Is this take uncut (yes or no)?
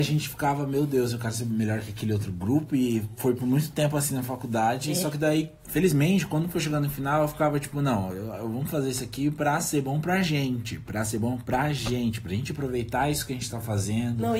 yes